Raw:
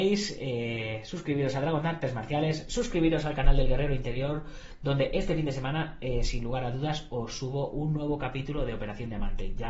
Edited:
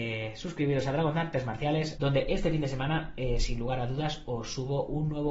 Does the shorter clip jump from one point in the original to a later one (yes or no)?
yes